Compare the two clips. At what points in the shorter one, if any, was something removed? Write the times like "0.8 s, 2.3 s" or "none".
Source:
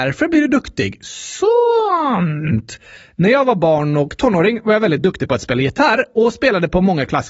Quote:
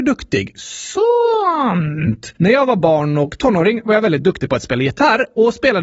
2.4 s